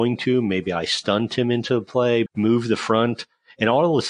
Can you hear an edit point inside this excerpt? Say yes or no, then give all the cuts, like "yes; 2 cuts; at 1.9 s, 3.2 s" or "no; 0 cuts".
yes; 1 cut; at 2.3 s